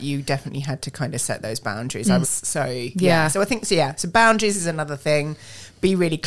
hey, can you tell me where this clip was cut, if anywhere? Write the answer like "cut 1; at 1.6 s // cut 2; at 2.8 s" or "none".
cut 1; at 2.2 s